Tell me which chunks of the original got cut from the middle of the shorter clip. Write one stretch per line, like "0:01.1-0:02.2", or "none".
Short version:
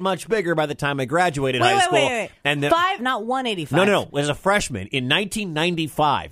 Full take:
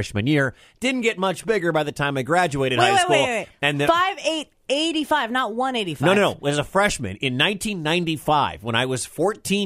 0:04.2-0:05.3

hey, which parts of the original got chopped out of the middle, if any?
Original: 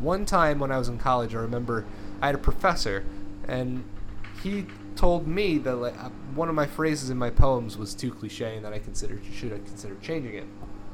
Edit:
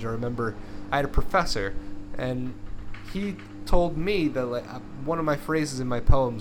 none

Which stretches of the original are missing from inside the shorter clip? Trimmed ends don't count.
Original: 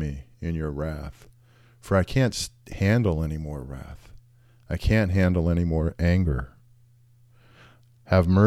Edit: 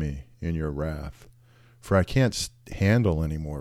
none

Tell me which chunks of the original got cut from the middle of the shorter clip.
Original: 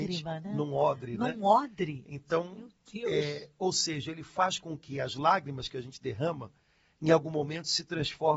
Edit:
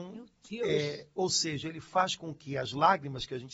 none

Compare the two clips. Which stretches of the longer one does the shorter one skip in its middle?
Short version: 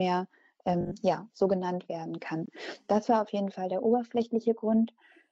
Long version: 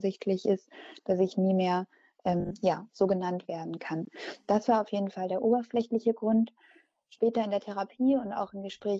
none

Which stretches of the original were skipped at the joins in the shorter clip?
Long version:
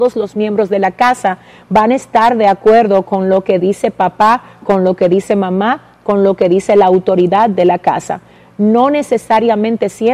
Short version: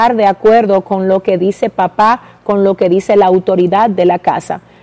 0:04.6-0:06.0

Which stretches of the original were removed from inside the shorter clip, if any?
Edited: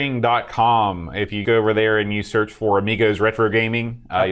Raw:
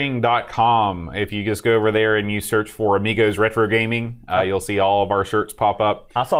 0:01.4-0:01.6

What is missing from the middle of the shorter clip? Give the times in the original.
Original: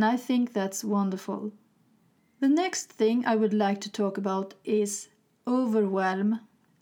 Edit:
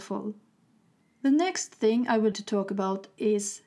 0:03.5-0:03.8

